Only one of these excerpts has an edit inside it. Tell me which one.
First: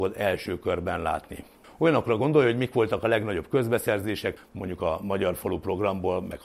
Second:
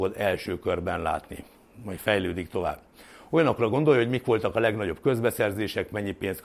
first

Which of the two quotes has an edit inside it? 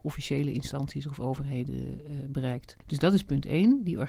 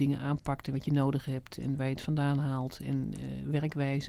first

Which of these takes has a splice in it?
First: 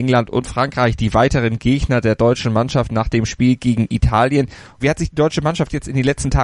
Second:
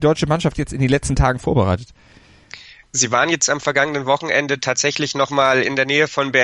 first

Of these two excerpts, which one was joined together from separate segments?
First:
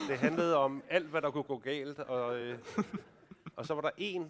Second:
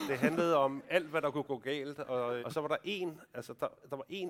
second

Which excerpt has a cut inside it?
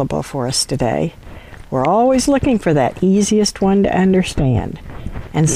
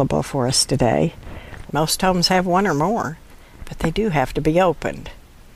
second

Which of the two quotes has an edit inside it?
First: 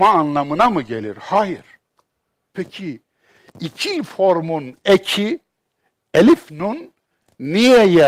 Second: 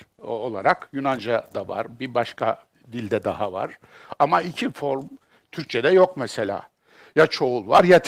first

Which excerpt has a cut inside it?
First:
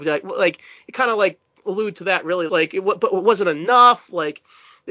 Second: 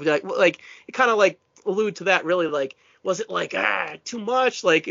first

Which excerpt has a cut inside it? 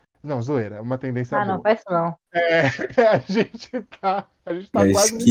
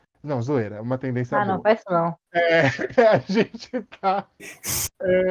second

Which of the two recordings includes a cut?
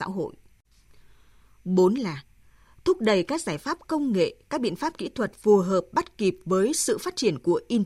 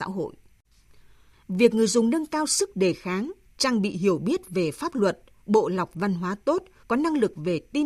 second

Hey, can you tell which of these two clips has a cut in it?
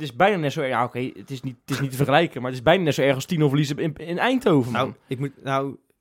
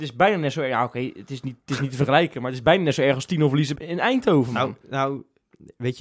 second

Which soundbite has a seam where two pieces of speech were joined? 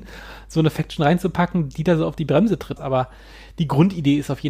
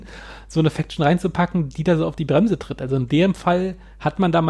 first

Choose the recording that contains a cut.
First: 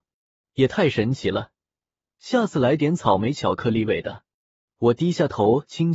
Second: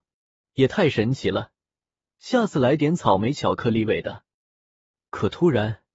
first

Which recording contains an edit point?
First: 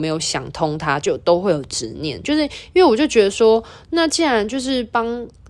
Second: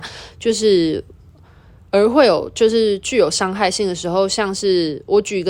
first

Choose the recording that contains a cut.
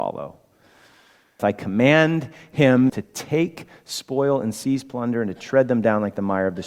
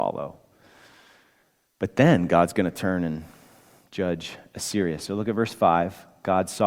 first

